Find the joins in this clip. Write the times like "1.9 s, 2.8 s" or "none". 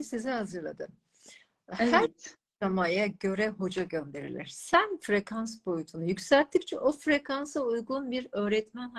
none